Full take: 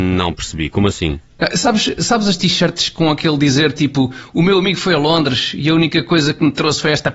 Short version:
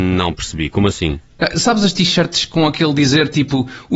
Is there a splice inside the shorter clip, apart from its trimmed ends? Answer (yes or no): yes